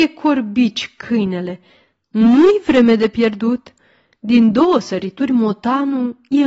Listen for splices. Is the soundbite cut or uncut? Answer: uncut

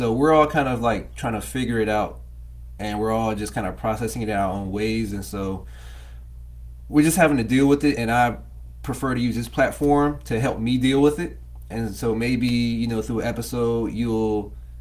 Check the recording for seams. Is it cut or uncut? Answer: uncut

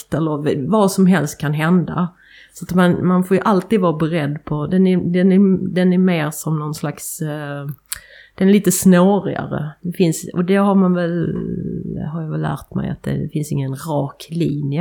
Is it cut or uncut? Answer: uncut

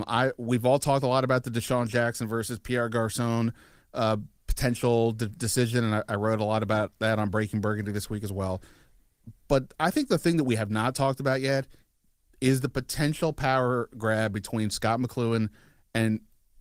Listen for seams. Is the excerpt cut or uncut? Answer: uncut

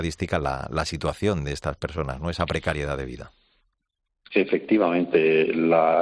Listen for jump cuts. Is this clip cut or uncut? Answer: uncut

